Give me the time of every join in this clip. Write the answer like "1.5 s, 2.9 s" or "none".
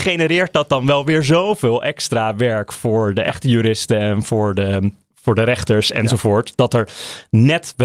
5.1 s